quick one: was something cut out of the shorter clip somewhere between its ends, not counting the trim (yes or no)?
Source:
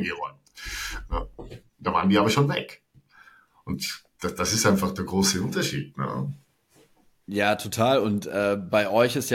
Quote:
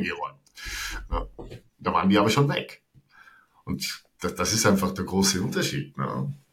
no